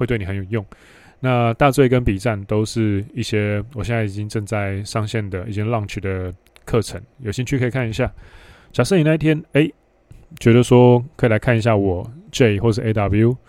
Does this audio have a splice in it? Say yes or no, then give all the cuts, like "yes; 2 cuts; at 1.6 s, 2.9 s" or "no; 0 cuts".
yes; 1 cut; at 8.5 s